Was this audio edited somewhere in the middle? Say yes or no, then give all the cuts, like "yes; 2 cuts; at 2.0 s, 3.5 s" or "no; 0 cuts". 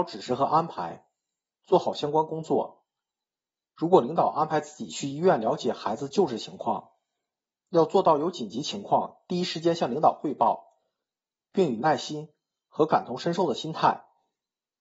no; 0 cuts